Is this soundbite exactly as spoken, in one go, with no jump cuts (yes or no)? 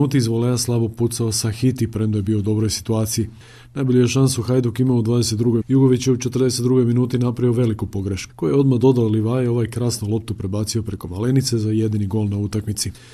no